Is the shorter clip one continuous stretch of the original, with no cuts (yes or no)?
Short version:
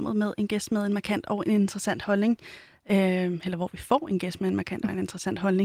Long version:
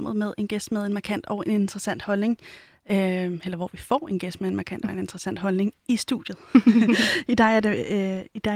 yes